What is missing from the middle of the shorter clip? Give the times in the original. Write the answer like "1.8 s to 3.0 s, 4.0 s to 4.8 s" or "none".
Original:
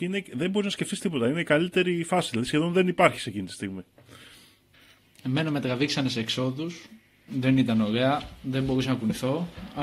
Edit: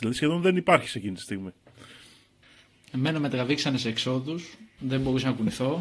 7.1 s to 8.4 s